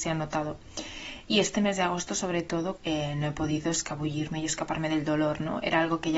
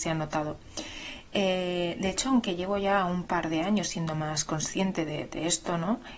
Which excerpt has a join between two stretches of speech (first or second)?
first